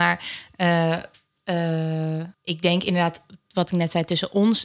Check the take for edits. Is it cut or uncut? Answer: cut